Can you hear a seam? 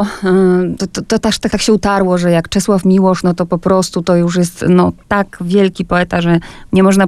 yes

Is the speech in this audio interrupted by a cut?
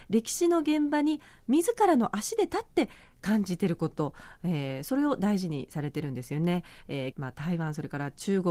yes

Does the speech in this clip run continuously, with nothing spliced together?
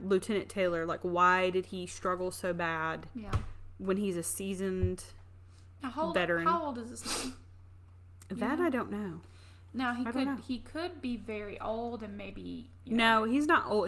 yes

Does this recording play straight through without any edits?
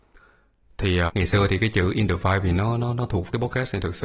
no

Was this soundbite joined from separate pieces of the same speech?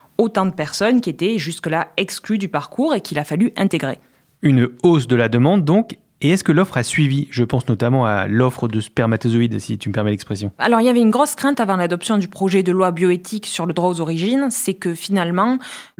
no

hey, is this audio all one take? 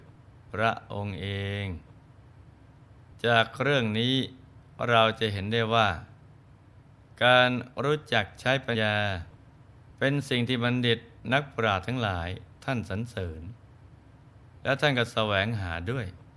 no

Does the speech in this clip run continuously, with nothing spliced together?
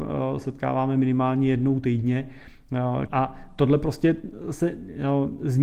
no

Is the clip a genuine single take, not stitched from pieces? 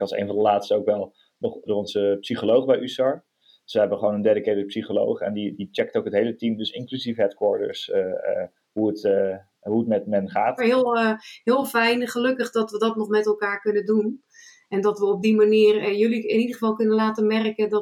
no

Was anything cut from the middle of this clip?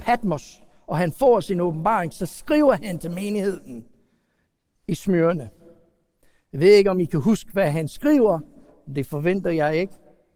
no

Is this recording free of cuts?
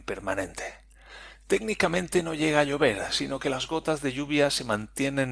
yes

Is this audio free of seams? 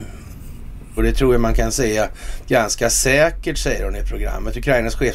no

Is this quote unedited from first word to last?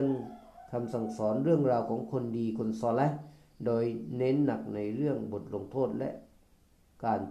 yes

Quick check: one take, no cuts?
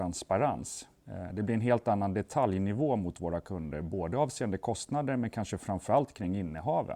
yes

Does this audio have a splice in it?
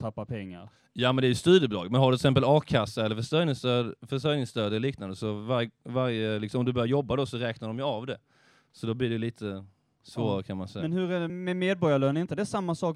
yes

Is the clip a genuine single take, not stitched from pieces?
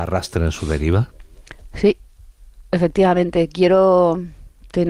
yes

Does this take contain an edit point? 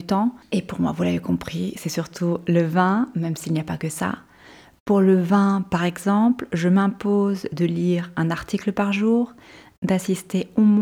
no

